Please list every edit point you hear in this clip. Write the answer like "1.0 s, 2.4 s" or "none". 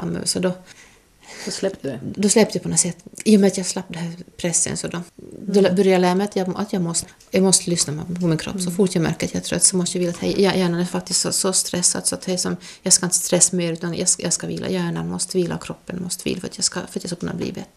none